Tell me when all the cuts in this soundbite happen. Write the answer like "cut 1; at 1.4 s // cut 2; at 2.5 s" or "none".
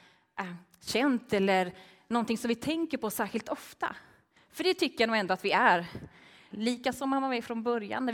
cut 1; at 4.4 s // cut 2; at 6.5 s